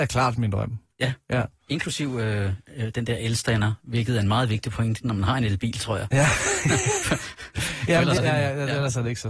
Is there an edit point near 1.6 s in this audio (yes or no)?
no